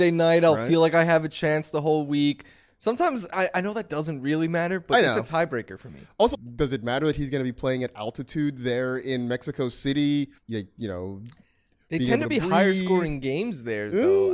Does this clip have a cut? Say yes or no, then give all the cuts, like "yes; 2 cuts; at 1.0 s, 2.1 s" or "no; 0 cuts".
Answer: yes; 2 cuts; at 6.3 s, 10.4 s